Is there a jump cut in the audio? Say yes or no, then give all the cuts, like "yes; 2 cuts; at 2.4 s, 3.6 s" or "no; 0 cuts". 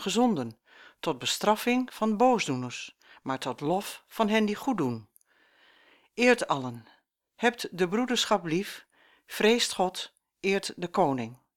no; 0 cuts